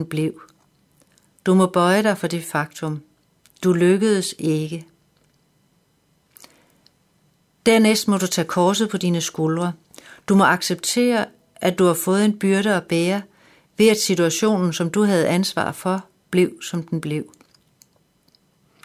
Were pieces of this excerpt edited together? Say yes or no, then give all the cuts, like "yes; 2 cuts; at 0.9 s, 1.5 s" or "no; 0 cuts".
no; 0 cuts